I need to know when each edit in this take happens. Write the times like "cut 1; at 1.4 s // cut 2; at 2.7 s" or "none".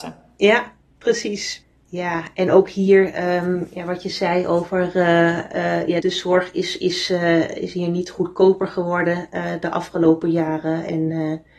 cut 1; at 6.0 s

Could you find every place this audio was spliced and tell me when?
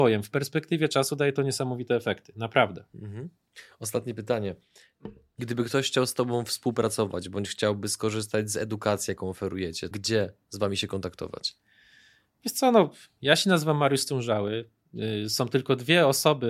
cut 1; at 9.9 s

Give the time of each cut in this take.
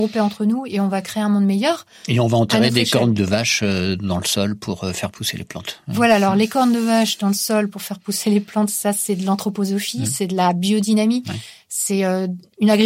none

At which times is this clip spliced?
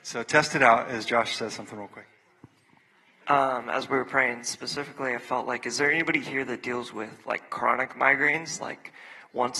none

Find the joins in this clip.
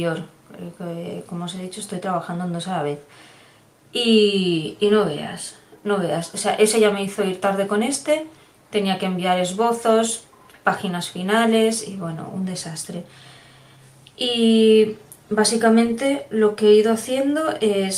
none

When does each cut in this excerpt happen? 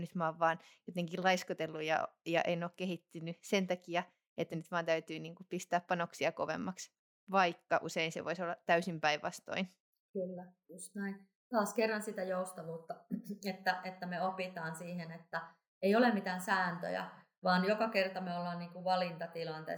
none

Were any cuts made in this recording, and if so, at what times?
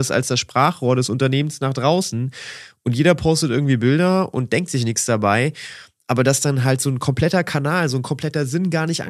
none

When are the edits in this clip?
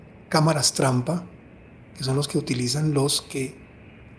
cut 1; at 1.9 s

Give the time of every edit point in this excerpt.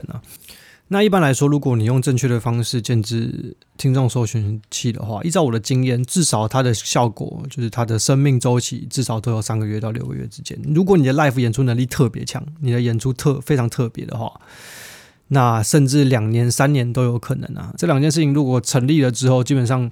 cut 1; at 6.8 s // cut 2; at 17.8 s

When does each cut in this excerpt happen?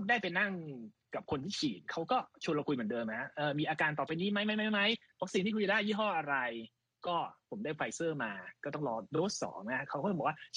none

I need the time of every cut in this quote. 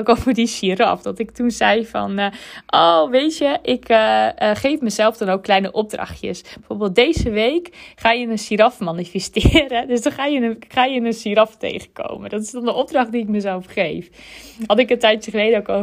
none

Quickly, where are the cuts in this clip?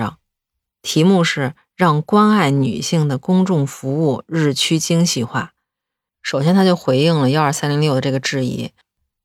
cut 1; at 6.1 s

